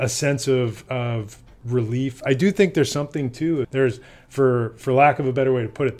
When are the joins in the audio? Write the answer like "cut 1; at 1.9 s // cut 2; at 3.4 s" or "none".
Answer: cut 1; at 3.6 s